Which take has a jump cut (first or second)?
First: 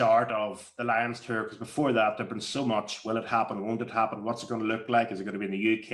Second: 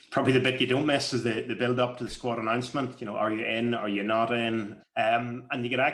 second